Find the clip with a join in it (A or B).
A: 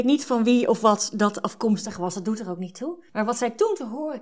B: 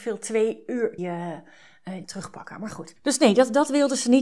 B